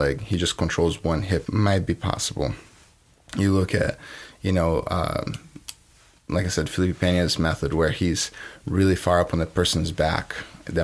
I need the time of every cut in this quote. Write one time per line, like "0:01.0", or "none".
0:01.4